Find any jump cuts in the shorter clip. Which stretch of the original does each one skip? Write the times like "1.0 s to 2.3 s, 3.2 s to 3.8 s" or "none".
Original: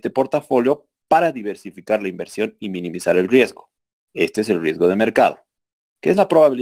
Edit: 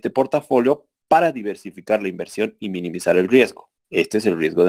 3.8 s to 4.0 s